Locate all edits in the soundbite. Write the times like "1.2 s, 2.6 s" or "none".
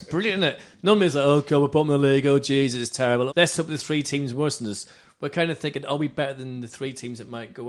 3.3 s